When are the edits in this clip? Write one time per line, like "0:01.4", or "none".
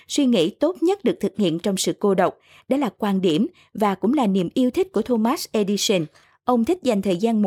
none

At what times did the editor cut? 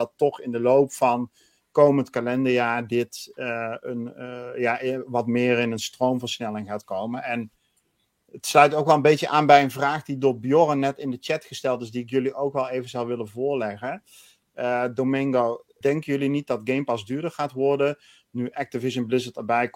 0:15.8

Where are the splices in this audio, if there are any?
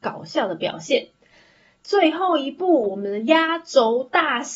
none

